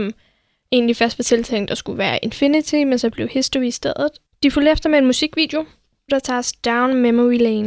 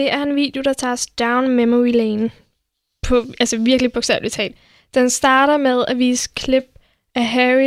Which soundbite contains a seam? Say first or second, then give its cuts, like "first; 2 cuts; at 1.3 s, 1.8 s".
first; 1 cut; at 6.1 s